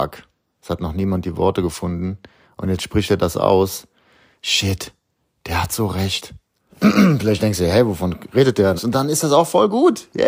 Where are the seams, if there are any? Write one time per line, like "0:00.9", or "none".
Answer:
0:06.7
0:08.8